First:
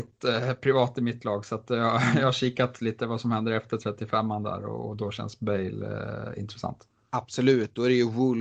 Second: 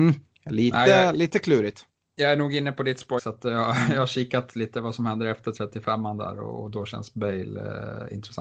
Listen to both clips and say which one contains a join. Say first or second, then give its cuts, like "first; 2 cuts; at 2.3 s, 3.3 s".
second; 1 cut; at 3.2 s